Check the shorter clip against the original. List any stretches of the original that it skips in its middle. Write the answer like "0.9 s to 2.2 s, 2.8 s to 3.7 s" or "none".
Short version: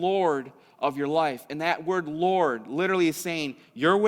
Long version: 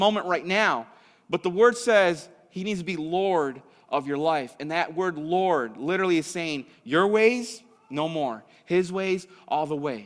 none